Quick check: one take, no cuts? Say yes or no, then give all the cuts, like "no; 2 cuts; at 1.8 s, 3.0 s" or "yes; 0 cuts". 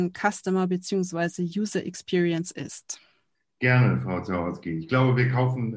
yes; 0 cuts